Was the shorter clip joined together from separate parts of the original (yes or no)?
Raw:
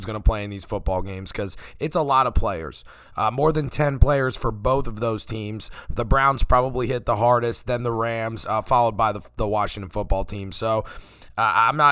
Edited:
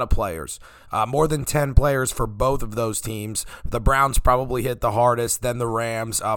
no